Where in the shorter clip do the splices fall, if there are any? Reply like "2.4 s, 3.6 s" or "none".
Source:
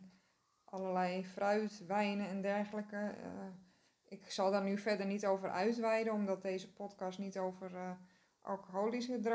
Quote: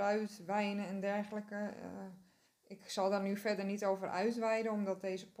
none